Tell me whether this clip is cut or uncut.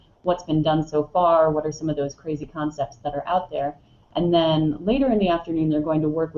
uncut